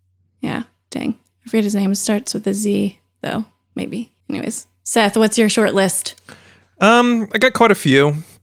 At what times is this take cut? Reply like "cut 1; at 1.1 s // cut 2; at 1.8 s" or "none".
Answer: cut 1; at 4.2 s

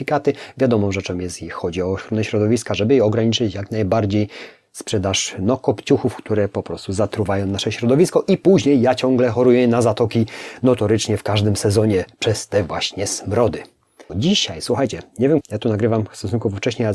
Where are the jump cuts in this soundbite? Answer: cut 1; at 14.1 s // cut 2; at 15.4 s

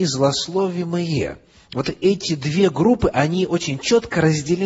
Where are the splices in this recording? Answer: none

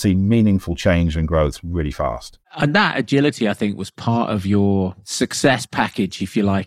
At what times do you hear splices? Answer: none

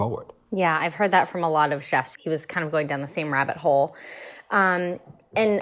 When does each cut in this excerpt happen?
cut 1; at 2.1 s

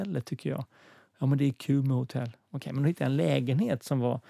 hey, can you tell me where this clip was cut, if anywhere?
none

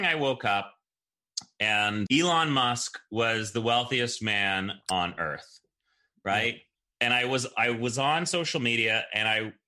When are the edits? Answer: cut 1; at 2.1 s

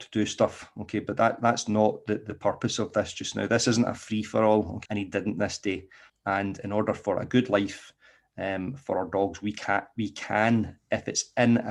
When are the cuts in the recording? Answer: cut 1; at 4.9 s // cut 2; at 6.1 s

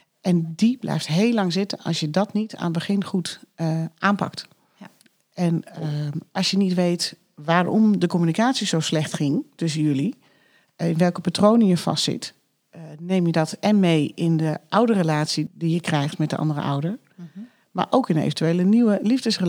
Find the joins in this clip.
cut 1; at 15.5 s

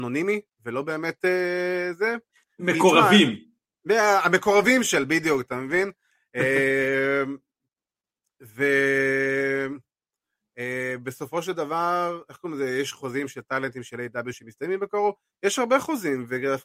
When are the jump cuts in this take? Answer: none

